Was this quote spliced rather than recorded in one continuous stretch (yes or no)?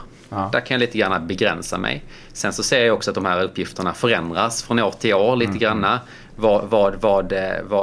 no